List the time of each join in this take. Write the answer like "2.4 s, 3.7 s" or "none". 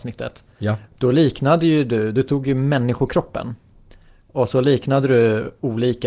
none